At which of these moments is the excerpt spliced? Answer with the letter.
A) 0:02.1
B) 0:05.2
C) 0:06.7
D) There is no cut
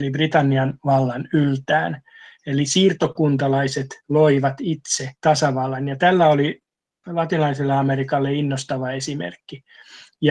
B